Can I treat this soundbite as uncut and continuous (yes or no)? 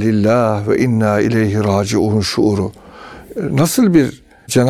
yes